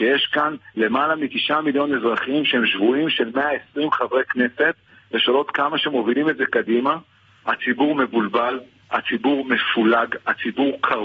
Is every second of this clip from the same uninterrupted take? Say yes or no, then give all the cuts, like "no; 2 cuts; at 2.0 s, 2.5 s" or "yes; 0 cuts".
yes; 0 cuts